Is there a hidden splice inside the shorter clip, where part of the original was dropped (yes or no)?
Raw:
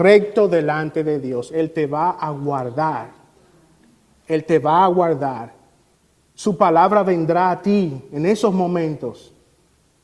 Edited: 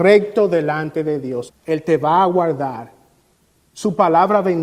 yes